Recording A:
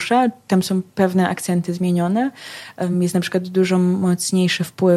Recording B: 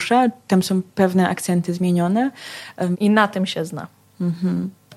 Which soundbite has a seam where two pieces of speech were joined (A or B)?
B